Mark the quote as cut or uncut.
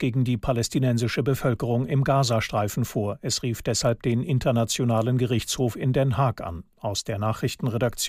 uncut